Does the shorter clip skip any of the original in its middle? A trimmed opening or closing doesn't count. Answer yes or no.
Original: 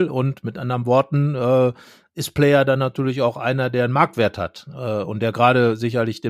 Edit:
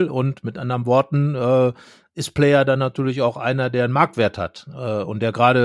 no